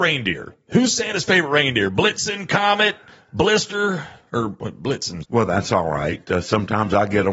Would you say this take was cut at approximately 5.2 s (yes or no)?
yes